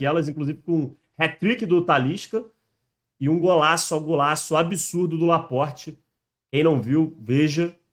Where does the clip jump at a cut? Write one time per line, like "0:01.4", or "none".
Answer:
none